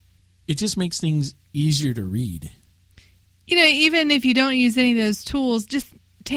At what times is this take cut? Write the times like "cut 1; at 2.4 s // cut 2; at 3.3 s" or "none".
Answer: none